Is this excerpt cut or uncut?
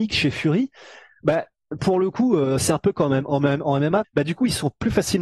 cut